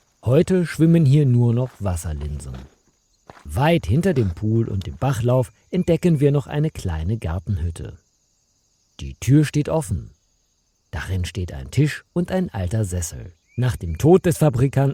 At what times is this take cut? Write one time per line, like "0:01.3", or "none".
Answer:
0:13.4